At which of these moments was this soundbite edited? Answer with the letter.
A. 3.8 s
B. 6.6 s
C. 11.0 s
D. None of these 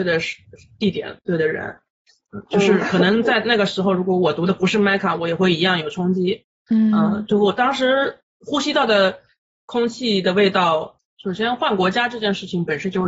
C